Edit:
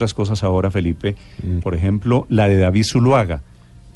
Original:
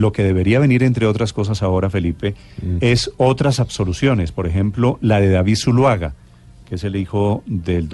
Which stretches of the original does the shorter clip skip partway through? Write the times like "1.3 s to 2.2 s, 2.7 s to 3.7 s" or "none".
2.8 s to 4.3 s